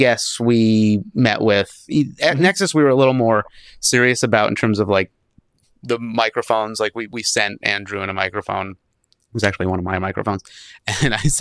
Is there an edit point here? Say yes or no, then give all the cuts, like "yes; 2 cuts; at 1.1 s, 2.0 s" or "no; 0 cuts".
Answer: no; 0 cuts